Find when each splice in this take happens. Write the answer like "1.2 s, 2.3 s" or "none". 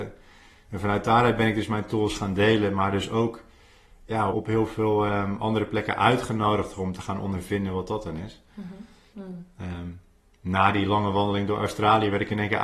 4.3 s, 9.1 s

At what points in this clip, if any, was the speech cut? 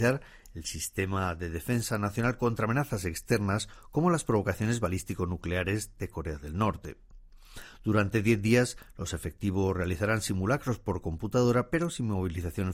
none

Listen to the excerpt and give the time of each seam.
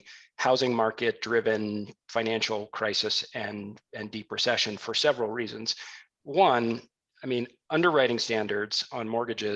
none

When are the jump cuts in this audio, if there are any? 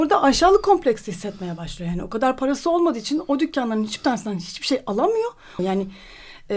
5.6 s

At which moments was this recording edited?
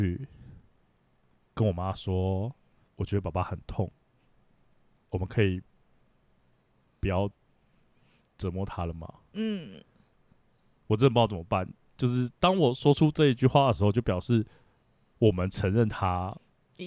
none

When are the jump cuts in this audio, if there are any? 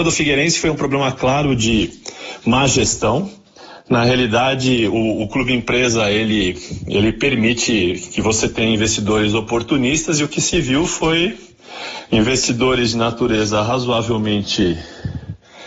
none

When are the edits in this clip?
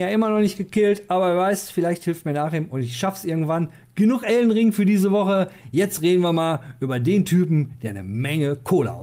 none

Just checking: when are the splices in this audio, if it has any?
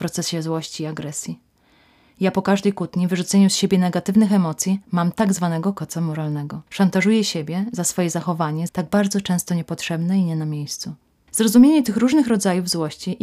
6.7 s, 8.7 s, 11.3 s

